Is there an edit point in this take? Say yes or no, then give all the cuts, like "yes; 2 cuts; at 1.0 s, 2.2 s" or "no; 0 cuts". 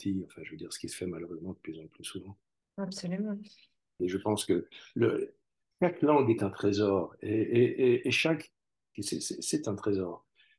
yes; 2 cuts; at 4.0 s, 8.9 s